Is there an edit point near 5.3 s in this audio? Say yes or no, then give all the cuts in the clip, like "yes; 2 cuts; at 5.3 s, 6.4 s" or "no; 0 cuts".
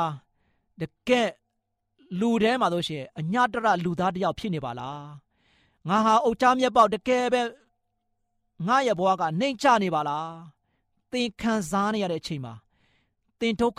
no; 0 cuts